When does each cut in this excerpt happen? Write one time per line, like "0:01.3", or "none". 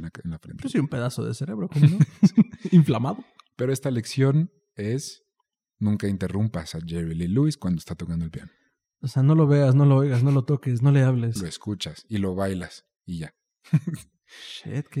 0:11.4